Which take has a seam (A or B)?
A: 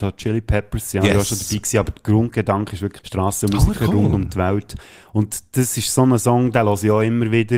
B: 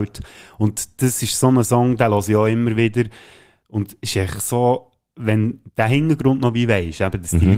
A